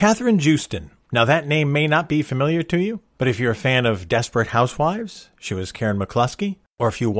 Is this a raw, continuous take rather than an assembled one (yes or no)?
yes